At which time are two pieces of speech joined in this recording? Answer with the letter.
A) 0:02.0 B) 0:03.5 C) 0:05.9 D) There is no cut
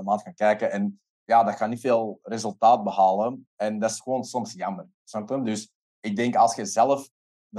C